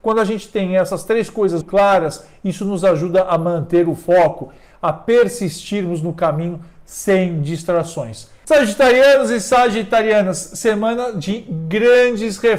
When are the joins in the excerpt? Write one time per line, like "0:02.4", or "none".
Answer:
0:01.6
0:08.4

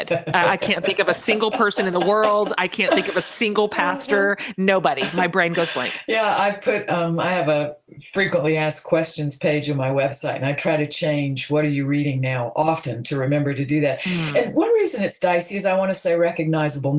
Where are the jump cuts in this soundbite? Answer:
none

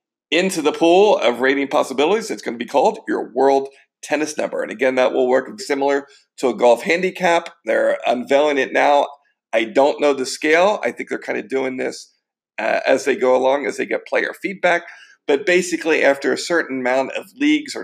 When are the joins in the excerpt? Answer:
0:05.6

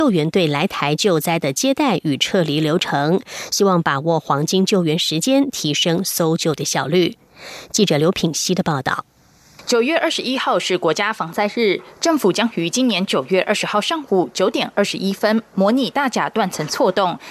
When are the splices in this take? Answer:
none

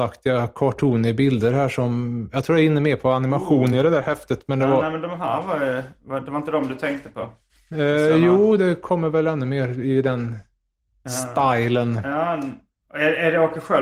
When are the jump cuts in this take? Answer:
none

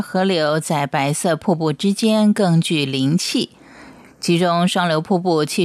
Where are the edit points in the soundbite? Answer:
0:04.1

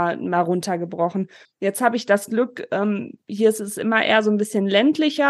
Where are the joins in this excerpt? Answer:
0:01.5

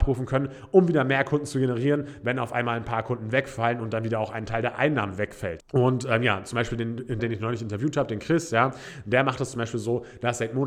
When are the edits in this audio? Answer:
0:05.6
0:07.2

